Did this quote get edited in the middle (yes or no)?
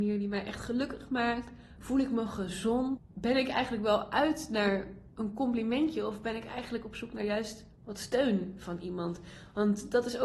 yes